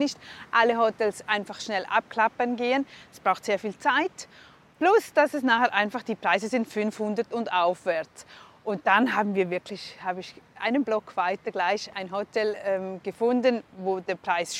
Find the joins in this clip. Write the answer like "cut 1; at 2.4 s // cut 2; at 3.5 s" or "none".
none